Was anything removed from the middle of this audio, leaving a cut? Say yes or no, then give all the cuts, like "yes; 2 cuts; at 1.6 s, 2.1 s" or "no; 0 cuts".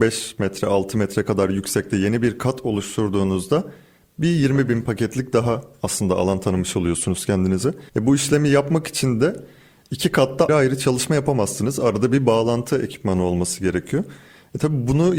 yes; 2 cuts; at 7.9 s, 10.5 s